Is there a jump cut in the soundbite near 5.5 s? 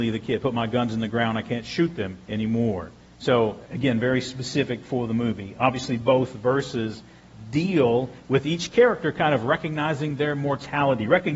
no; 2 cuts; at 2.2 s, 3.6 s

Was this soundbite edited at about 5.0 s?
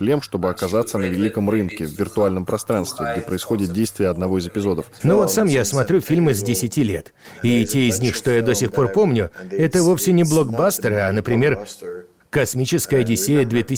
yes; 1 cut; at 5.0 s

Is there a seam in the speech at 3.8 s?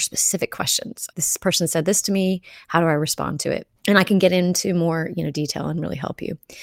yes; 2 cuts; at 1.1 s, 3.8 s

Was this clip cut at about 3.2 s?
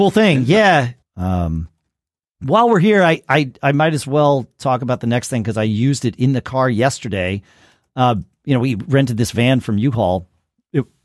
no; 1 cut; at 1.0 s

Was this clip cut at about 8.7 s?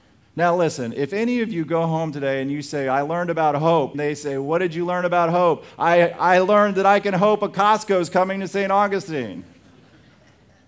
no; 1 cut; at 3.9 s

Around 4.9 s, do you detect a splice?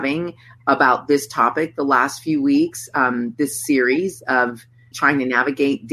yes; 1 cut; at 4.9 s

